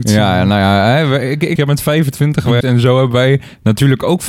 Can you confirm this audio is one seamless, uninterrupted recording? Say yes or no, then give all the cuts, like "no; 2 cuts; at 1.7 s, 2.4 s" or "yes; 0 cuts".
no; 2 cuts; at 1.6 s, 2.6 s